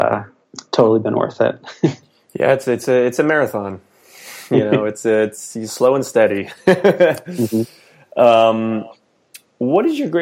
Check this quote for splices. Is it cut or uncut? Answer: uncut